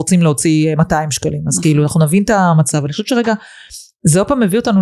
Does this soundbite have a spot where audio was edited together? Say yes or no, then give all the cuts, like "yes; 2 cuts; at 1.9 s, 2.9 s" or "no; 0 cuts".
no; 0 cuts